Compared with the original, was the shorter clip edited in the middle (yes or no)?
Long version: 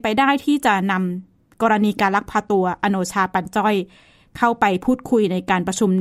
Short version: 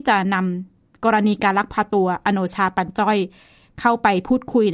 no